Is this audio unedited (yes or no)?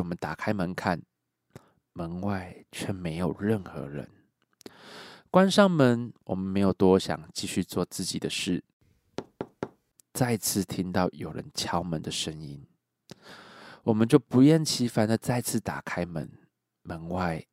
yes